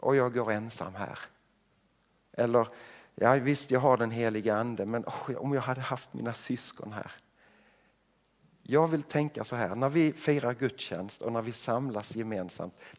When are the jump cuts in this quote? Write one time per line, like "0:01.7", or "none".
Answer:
none